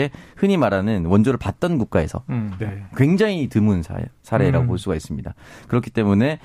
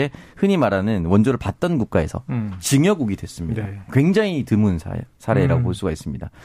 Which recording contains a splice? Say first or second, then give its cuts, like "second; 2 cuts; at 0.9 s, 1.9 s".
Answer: first; 1 cut; at 2.6 s